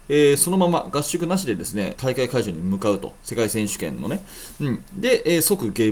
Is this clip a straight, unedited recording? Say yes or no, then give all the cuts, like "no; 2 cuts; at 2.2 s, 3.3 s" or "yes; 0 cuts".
no; 1 cut; at 1.9 s